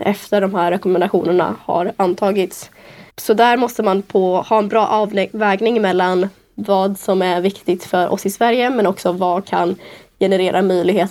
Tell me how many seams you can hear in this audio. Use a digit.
1